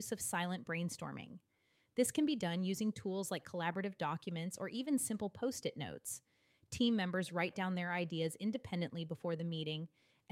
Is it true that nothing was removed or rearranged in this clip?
yes; 0 cuts

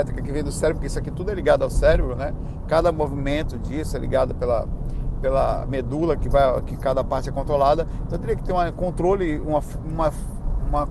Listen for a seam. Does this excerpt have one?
no; 0 cuts

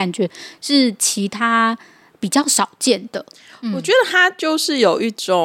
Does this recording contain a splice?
no; 0 cuts

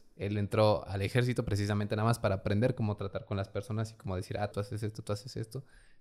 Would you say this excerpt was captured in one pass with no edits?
no; 1 cut; at 4.5 s

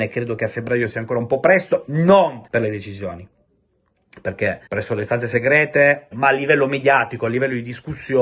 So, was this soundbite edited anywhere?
yes; 3 cuts; at 2.5 s, 4.7 s, 6.1 s

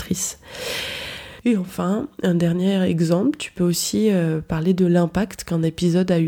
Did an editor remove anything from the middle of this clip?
no; 0 cuts

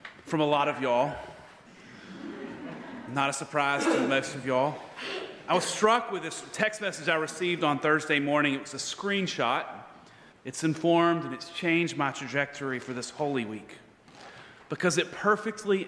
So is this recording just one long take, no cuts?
no; 1 cut; at 10.3 s

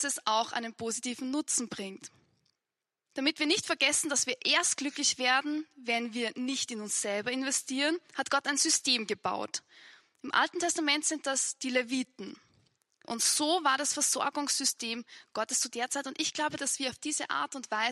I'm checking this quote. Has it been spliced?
yes; 2 cuts; at 13.0 s, 16.6 s

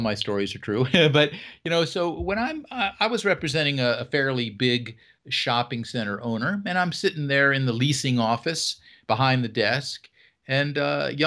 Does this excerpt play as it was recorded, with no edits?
yes; 0 cuts

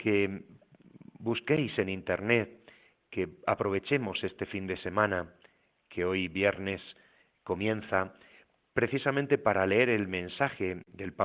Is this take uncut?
yes; 0 cuts

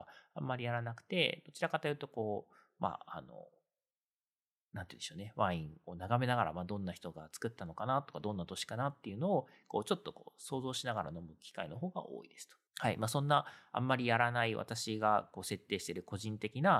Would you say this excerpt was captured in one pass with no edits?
no; 1 cut; at 12.7 s

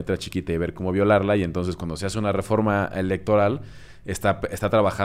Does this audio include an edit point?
no; 0 cuts

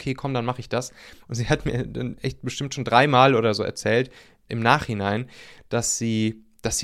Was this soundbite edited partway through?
yes; 2 cuts; at 1.2 s, 4.5 s

